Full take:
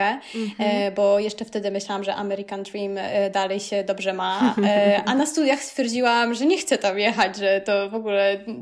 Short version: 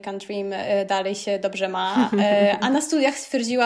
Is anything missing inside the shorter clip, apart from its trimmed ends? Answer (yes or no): no